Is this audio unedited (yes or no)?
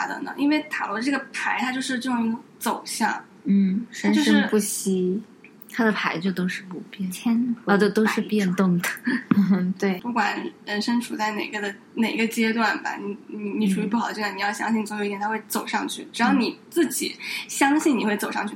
no